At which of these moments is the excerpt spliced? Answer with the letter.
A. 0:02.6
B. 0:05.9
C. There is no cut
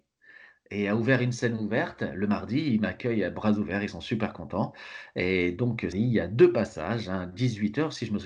B